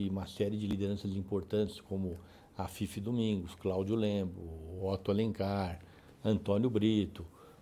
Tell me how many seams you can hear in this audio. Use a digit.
0